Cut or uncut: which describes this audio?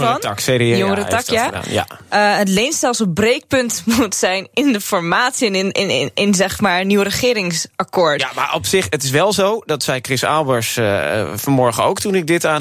uncut